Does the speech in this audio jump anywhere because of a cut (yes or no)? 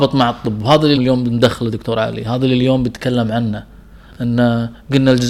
yes